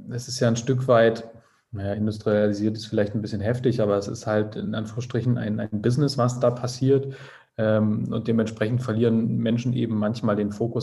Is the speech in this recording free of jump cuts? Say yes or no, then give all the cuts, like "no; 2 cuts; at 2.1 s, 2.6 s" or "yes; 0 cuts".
yes; 0 cuts